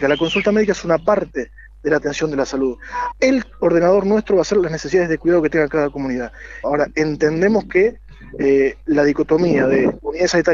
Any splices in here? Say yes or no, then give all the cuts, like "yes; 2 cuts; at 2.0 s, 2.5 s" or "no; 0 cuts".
yes; 2 cuts; at 3.1 s, 6.6 s